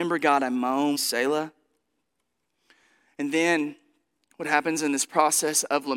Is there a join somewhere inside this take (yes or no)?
yes